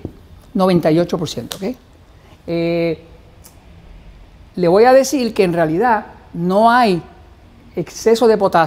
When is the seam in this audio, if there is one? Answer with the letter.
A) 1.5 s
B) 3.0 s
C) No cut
C